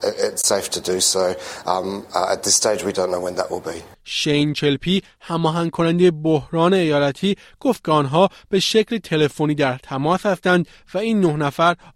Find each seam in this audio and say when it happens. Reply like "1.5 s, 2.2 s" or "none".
3.9 s